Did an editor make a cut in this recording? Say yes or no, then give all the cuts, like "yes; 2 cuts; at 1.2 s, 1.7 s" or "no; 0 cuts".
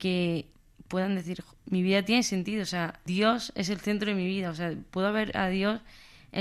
no; 0 cuts